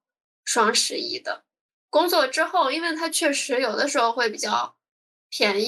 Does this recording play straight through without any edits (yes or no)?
yes